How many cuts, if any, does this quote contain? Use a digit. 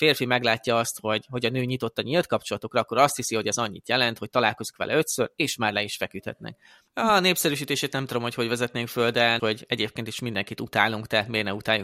2